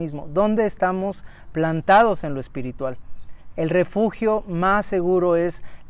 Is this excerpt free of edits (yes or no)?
yes